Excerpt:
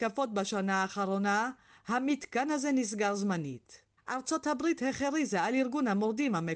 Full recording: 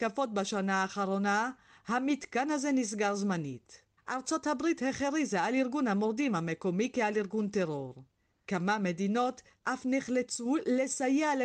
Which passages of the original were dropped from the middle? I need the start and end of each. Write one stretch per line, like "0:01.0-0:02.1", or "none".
none